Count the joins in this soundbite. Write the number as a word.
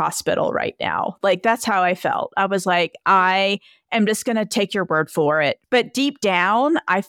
zero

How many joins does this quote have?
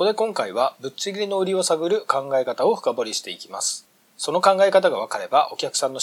zero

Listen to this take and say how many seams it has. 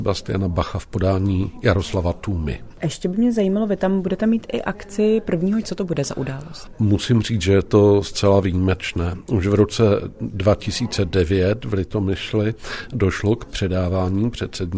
one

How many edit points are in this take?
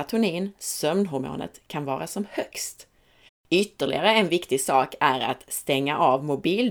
one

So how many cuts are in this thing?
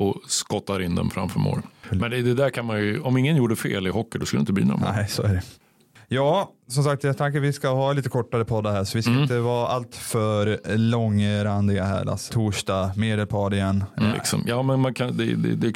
three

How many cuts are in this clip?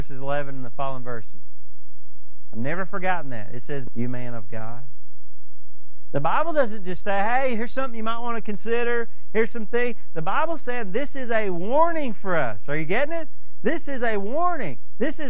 one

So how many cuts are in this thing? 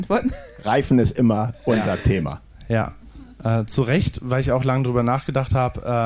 zero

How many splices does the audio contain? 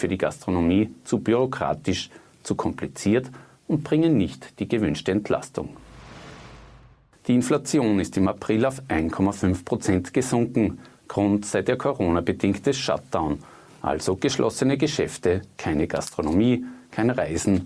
one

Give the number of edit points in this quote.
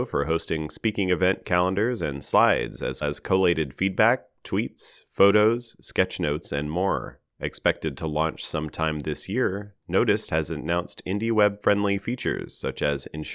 two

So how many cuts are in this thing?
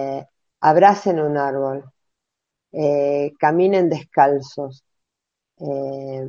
zero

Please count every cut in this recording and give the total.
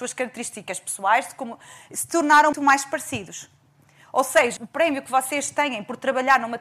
two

